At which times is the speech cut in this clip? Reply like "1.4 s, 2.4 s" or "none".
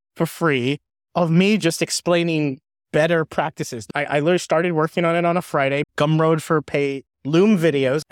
5.8 s, 7.1 s